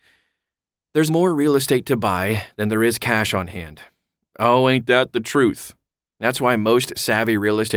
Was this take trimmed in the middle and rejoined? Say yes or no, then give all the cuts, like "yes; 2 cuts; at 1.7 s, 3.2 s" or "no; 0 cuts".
yes; 1 cut; at 1.1 s